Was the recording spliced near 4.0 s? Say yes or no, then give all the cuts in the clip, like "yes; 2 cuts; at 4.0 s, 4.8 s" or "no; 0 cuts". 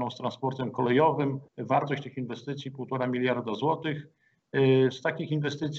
no; 1 cut; at 1.5 s